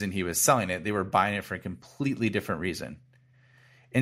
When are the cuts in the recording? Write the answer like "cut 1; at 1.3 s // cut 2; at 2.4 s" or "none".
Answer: none